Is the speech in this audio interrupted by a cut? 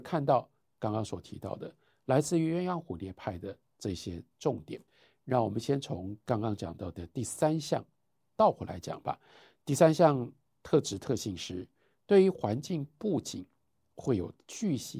no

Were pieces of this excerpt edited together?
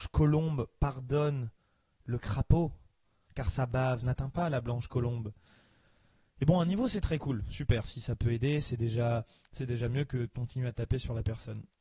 no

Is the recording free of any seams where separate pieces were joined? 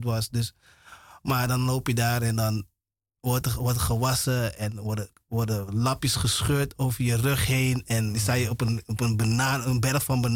yes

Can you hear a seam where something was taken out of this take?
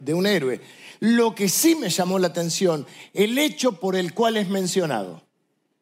no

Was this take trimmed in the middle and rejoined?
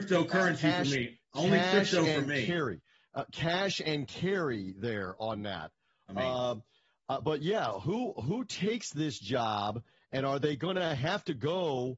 no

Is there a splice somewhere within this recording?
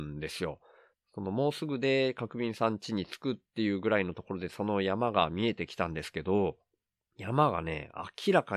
yes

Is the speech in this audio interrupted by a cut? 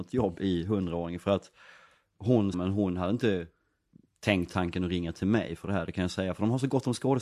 yes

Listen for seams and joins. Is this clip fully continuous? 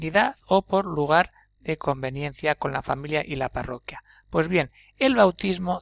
yes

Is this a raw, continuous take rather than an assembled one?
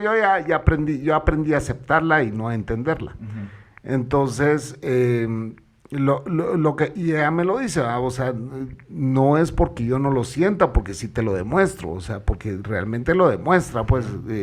yes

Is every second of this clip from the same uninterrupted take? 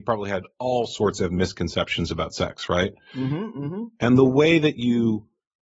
yes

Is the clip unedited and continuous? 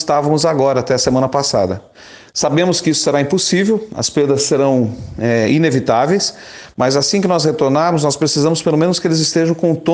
yes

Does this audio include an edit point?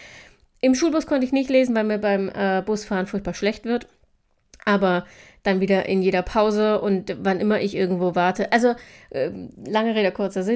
no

